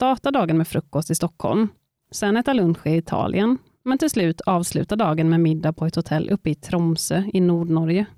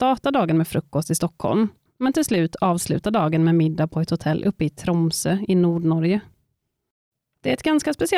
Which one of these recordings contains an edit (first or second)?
second